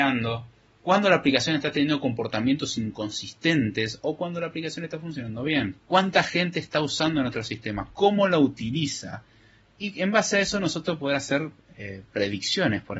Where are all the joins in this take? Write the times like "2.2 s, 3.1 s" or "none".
5.8 s